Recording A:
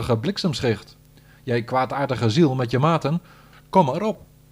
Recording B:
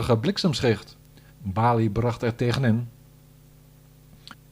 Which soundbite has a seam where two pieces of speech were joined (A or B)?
B